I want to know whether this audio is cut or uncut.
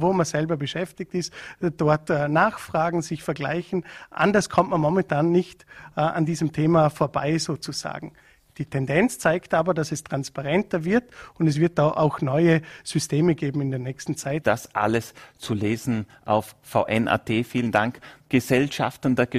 cut